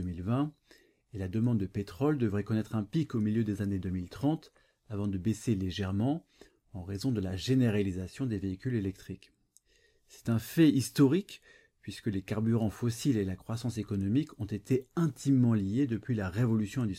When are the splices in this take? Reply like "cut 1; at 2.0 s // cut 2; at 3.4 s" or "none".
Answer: none